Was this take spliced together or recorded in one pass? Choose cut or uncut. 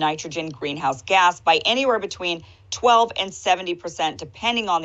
uncut